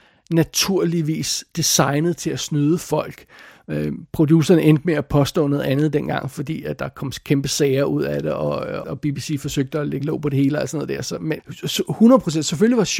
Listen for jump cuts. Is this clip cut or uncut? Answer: cut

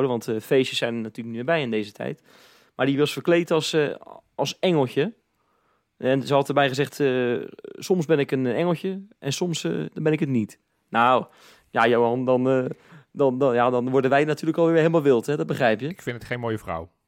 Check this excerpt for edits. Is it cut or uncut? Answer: uncut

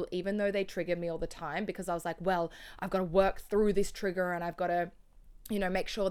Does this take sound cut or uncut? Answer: uncut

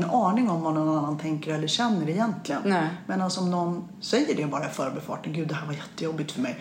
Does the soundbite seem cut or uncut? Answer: uncut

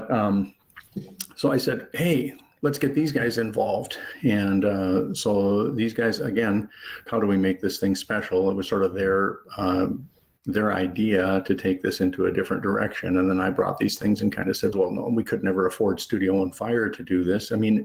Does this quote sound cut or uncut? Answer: cut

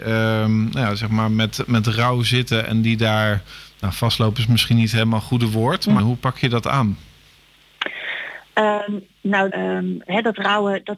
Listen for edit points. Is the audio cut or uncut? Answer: cut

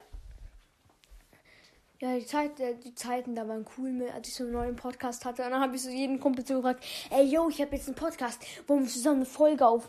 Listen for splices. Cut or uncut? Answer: uncut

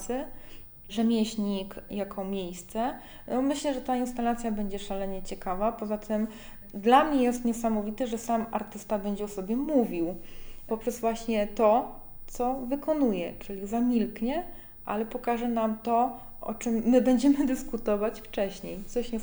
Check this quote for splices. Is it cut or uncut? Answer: uncut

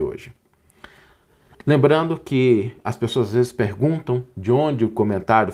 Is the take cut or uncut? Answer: uncut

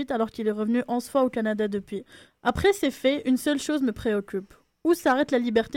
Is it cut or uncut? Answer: cut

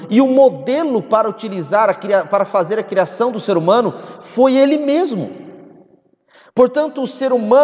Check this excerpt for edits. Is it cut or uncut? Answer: uncut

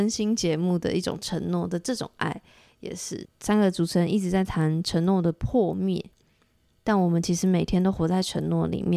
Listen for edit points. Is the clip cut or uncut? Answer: cut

